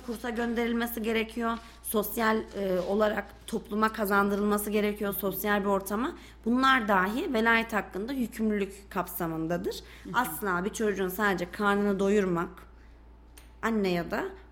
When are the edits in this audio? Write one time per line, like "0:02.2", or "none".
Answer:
none